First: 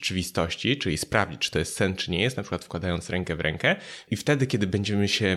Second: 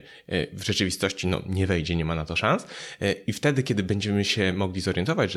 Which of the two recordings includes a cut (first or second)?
first